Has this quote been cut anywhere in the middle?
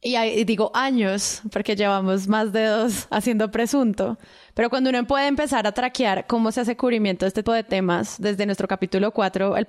yes; 1 cut; at 7.5 s

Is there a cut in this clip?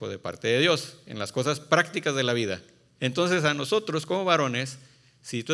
yes; 1 cut; at 3.0 s

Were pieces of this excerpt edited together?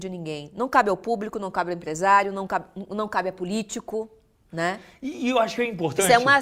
no; 0 cuts

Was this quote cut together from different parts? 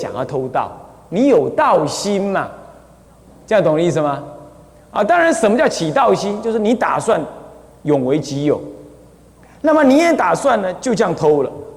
no; 0 cuts

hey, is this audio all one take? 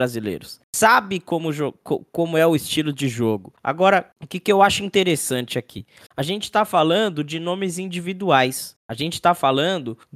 no; 1 cut; at 3.6 s

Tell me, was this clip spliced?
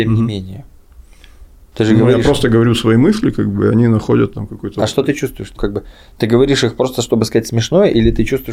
yes; 1 cut; at 5.6 s

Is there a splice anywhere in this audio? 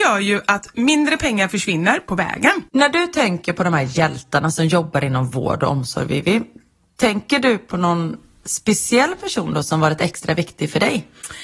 yes; 1 cut; at 2.7 s

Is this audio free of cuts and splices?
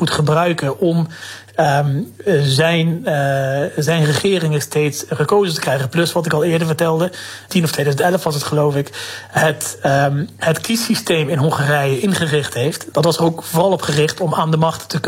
no; 2 cuts; at 7.5 s, 12.9 s

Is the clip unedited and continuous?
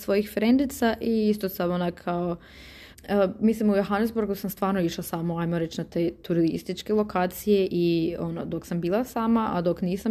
no; 1 cut; at 2.9 s

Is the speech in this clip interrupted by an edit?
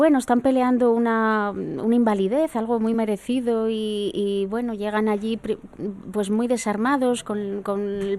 no; 0 cuts

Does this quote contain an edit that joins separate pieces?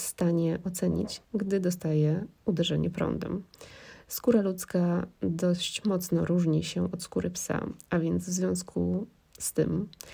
yes; 1 cut; at 1.2 s

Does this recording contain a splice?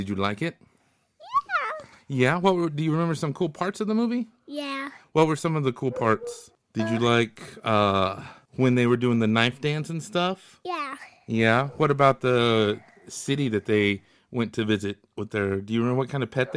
no; 0 cuts

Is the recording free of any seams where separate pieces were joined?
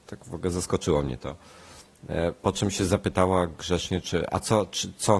yes; 0 cuts

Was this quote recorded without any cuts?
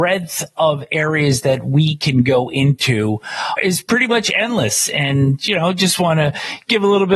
no; 1 cut; at 3.6 s

